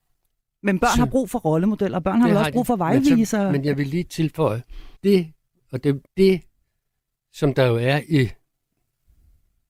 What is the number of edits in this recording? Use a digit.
2